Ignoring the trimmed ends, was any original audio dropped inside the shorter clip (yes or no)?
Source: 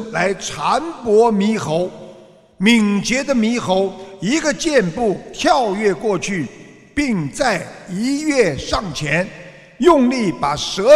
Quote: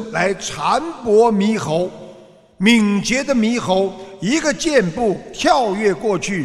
no